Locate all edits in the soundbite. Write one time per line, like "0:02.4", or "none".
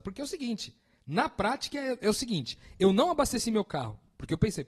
none